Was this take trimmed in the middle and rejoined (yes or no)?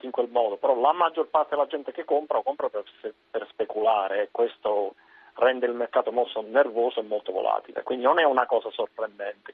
no